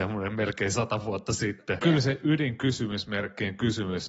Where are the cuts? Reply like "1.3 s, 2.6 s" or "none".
1.8 s